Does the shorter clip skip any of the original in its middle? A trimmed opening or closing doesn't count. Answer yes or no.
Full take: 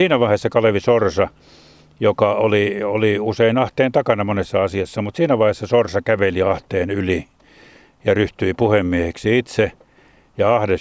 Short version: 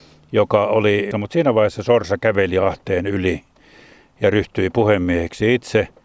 yes